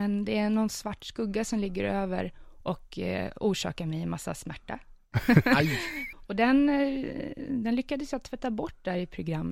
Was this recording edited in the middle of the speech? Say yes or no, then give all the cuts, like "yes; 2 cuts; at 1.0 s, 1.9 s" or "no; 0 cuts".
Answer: yes; 1 cut; at 6.1 s